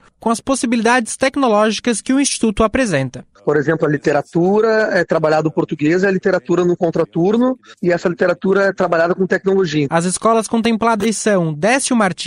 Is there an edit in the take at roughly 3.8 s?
no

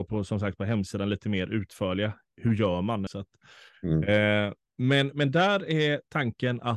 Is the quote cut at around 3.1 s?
yes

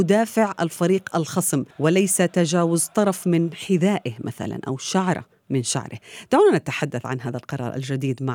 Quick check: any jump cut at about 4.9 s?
no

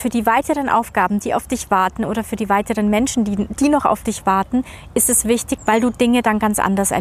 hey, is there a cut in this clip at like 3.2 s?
no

